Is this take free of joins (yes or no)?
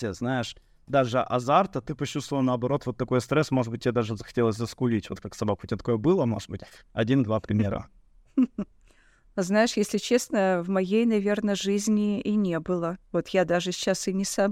yes